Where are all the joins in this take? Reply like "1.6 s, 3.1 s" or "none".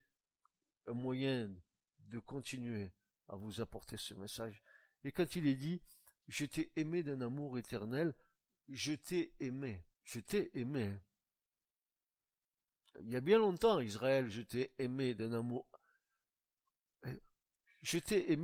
9.9 s

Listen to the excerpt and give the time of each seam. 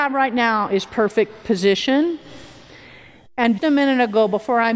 3.6 s

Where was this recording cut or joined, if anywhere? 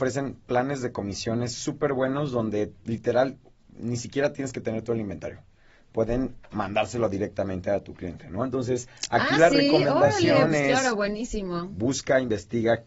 none

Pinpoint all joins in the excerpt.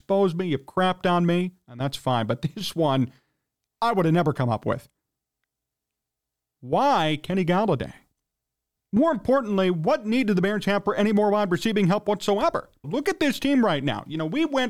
12.8 s

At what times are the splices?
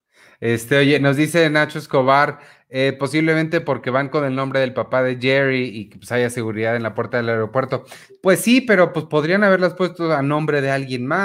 none

